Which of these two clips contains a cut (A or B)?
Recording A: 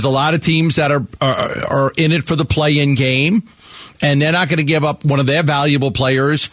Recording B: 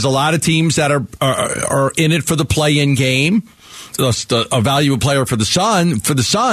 B